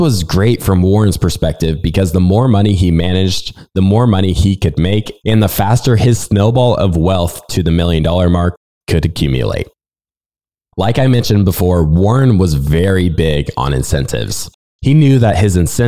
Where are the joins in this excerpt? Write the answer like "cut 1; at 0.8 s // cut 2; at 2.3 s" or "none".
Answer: none